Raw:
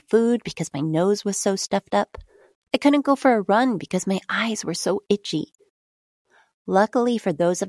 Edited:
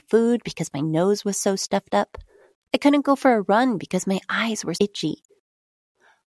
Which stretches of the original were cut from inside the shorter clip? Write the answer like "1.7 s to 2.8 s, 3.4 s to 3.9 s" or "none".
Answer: 4.8 s to 5.1 s